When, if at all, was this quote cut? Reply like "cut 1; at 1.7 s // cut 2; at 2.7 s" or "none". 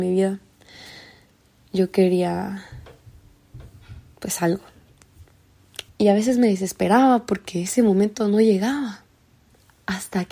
cut 1; at 5.9 s